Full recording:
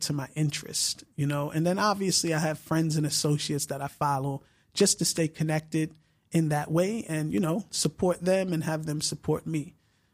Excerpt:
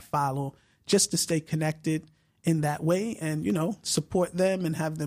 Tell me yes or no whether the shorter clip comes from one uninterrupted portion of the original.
yes